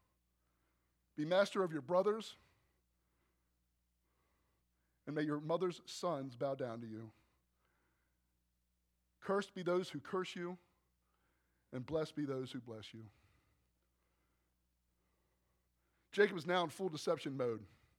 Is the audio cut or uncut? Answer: uncut